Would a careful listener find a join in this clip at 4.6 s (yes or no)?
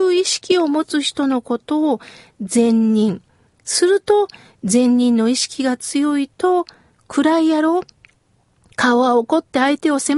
no